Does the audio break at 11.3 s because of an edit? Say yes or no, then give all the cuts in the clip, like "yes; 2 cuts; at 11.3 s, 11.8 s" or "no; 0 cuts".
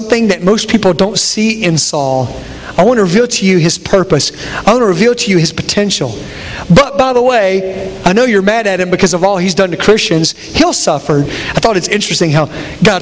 yes; 1 cut; at 11.3 s